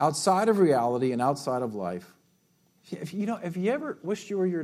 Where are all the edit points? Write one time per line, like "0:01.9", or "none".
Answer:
0:02.8